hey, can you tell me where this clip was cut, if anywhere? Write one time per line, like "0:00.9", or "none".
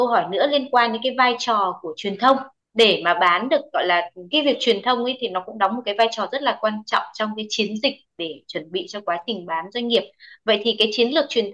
0:04.3